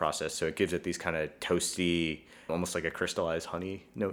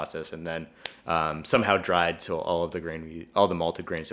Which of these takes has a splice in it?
first; 1 cut; at 2.5 s

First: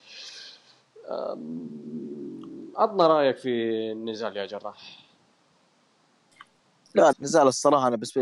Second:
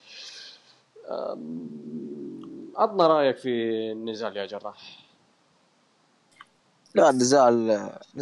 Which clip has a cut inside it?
first; 1 cut; at 7.1 s

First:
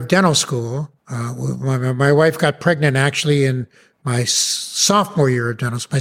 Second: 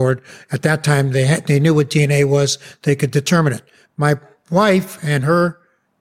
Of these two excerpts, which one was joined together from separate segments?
first; 1 cut; at 1.0 s

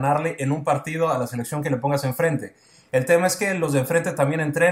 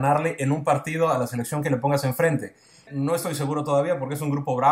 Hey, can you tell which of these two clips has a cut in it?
second; 1 cut; at 2.9 s

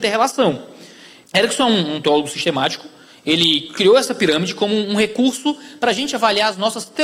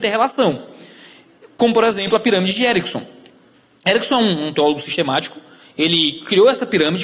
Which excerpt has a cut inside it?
first; 1 cut; at 1.2 s

